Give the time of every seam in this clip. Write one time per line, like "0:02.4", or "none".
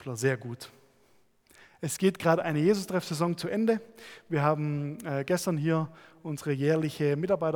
none

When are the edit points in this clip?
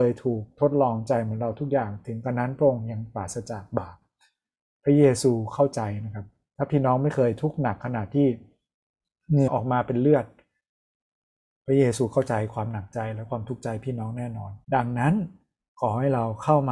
0:09.5
0:14.6

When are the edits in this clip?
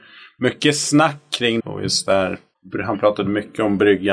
0:01.6

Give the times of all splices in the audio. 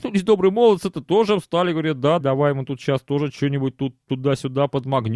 0:02.2

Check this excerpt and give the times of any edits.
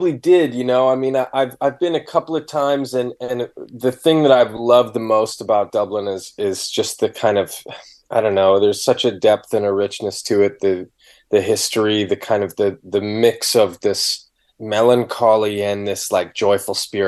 none

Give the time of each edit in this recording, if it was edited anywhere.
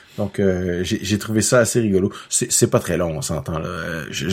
none

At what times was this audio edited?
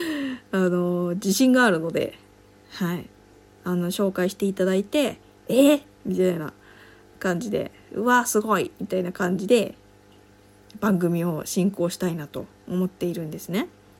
none

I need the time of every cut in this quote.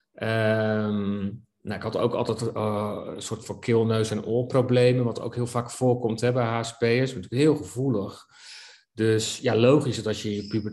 none

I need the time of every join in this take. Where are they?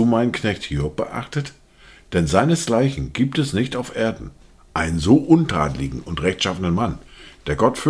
none

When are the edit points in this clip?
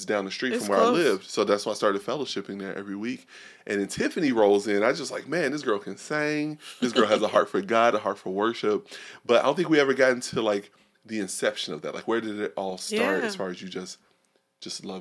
none

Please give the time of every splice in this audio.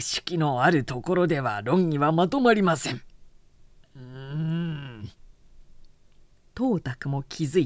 none

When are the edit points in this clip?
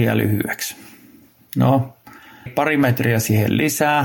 0:02.5

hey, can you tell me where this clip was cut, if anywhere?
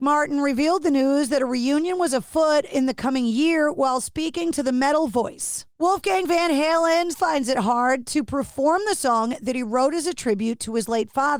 0:05.7
0:07.1

